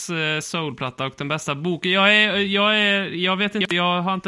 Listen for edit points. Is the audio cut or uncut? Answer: uncut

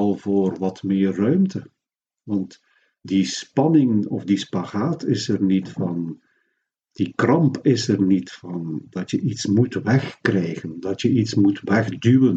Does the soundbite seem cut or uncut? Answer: uncut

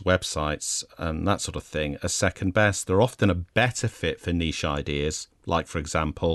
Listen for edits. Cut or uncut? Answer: uncut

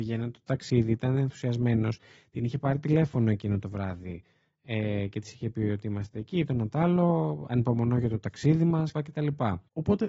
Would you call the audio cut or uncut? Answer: cut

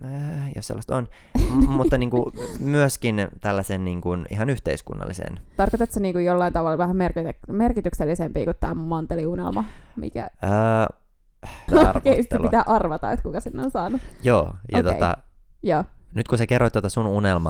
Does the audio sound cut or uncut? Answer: cut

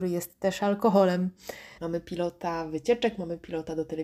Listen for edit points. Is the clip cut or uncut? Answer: cut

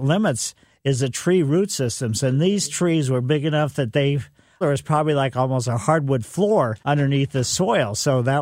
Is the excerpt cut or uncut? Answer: cut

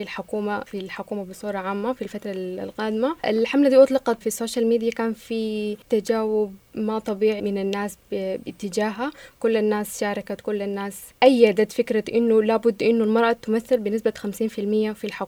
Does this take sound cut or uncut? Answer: cut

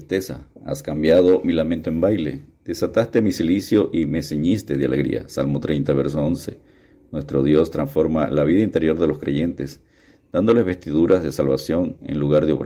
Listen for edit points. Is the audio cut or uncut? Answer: uncut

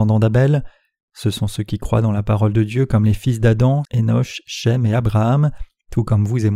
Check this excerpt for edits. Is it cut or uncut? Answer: cut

